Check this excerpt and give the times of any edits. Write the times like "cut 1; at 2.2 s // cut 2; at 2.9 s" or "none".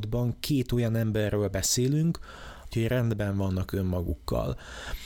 cut 1; at 2.7 s